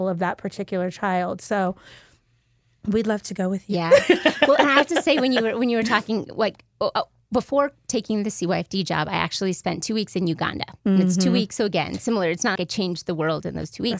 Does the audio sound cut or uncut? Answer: cut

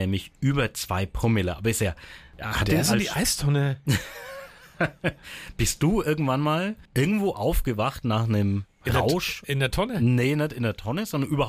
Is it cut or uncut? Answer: uncut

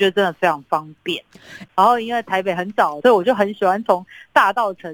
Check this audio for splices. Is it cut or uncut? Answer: cut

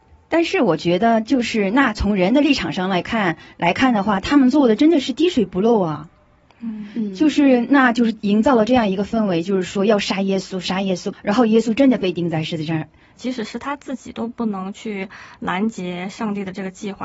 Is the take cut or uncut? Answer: cut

